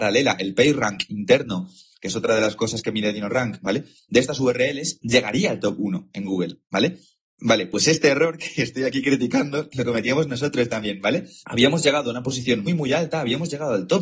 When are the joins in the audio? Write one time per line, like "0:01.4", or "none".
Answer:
0:11.4
0:12.7